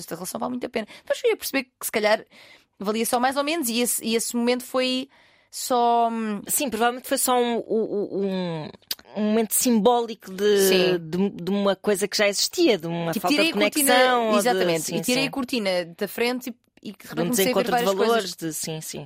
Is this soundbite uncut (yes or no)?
no